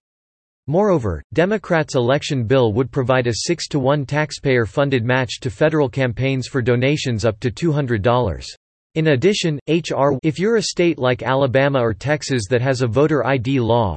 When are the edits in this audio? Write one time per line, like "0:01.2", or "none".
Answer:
0:08.9
0:10.2